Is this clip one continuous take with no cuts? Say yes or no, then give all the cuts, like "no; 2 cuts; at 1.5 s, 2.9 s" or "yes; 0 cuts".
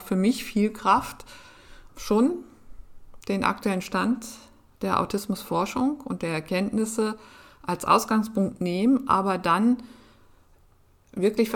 no; 1 cut; at 1.9 s